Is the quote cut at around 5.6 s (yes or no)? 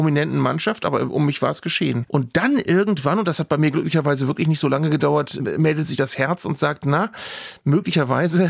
no